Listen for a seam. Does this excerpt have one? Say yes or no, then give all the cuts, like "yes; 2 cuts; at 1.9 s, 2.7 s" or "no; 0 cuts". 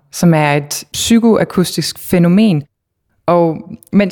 yes; 1 cut; at 3.1 s